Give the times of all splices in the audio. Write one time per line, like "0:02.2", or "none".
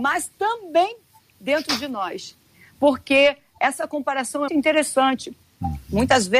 0:04.5